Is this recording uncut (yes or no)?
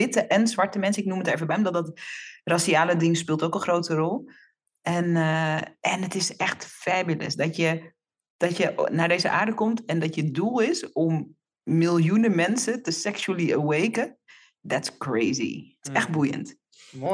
yes